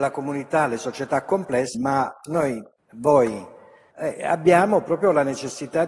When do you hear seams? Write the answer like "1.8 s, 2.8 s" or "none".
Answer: 1.7 s, 3.9 s